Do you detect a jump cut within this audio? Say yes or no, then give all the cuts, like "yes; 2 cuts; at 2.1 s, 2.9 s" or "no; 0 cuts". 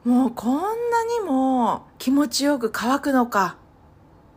yes; 1 cut; at 1.9 s